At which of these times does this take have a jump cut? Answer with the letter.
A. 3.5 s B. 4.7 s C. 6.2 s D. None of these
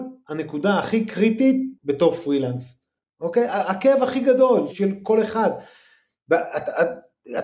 B